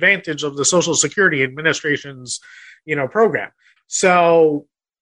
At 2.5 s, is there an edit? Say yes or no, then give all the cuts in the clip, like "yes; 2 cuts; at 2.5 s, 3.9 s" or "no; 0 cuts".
no; 1 cut; at 3.8 s